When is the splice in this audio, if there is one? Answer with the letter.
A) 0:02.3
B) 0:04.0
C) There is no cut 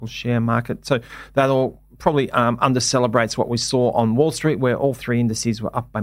C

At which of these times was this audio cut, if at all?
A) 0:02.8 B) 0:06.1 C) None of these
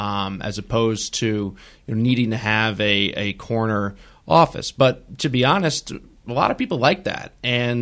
C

